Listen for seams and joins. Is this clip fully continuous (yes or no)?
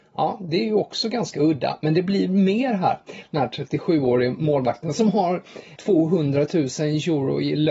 no